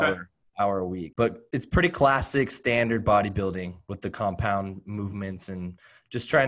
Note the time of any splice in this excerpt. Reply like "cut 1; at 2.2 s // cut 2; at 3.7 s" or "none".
cut 1; at 1.1 s